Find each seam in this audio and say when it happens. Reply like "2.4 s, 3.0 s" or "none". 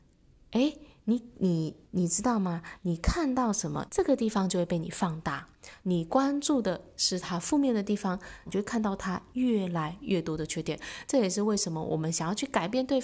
3.9 s, 5.8 s, 8.5 s